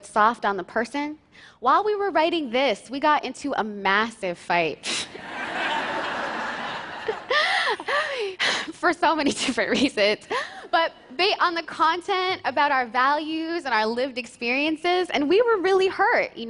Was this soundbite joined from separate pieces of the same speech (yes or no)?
no